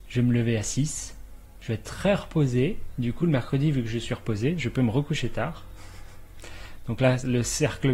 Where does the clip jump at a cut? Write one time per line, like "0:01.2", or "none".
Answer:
none